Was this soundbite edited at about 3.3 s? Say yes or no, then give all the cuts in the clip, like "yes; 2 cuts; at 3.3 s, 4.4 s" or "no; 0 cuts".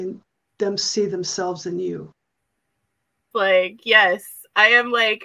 yes; 1 cut; at 3.3 s